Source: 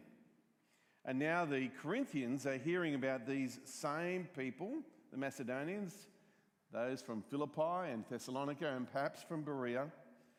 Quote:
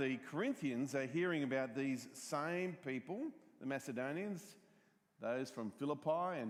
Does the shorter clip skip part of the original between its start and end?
no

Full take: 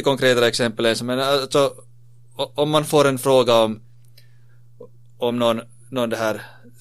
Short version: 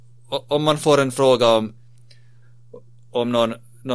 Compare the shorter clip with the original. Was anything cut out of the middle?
no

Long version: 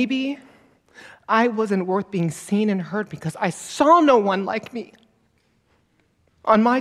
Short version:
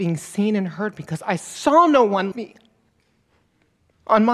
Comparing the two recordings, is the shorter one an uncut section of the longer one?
no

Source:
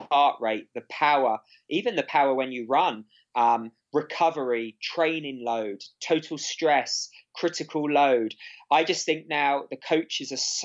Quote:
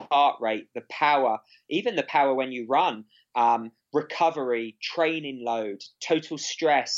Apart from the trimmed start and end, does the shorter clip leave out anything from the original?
no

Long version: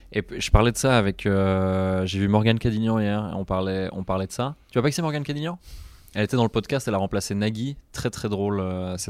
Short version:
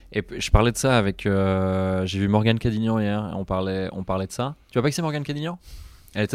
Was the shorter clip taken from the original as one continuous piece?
yes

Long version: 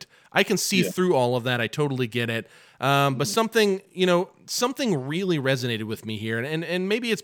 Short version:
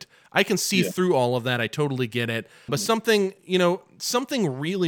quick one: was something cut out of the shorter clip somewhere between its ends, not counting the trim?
yes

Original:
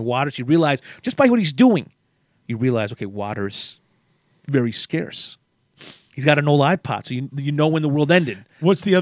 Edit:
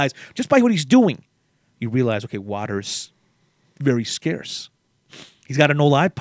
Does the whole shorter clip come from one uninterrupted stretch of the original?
yes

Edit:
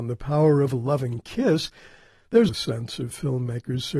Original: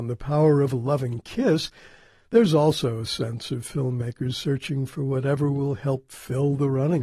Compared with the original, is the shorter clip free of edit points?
no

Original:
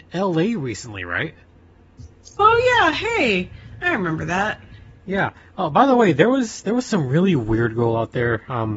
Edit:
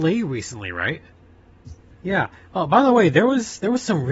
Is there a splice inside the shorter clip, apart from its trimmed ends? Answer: yes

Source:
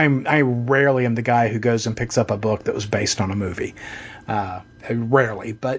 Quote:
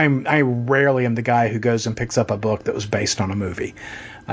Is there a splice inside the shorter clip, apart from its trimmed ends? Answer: no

